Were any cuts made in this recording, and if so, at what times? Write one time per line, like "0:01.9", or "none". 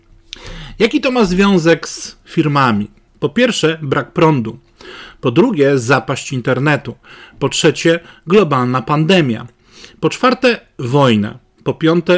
0:03.1